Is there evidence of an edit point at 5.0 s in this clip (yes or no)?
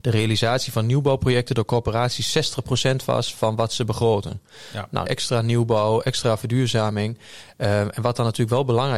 yes